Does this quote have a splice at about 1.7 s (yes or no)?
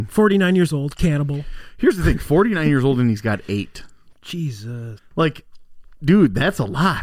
no